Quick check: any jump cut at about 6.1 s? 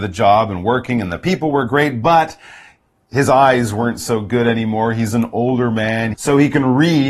yes; 1 cut; at 6.1 s

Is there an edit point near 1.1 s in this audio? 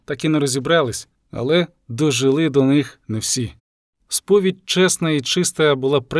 yes; 2 cuts; at 1.1 s, 4.0 s

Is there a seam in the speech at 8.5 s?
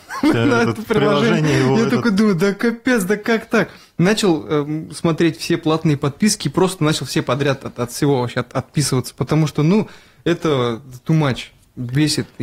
no; 0 cuts

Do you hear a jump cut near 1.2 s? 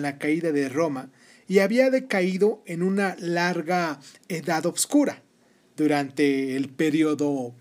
no; 0 cuts

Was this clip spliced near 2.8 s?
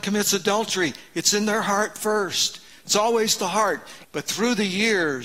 no; 1 cut; at 4.0 s

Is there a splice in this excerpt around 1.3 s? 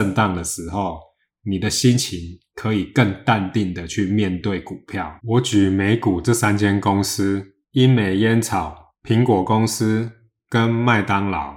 no; 2 cuts; at 5.2 s, 7.6 s

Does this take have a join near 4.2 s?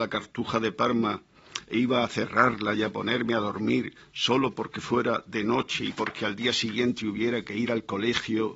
no; 0 cuts

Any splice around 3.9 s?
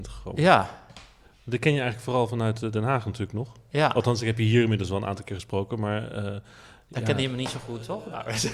no; 0 cuts

